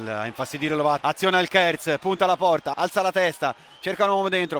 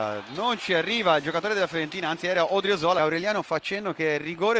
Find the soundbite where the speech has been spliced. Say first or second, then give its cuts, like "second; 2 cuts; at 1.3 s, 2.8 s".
first; 2 cuts; at 1.0 s, 2.7 s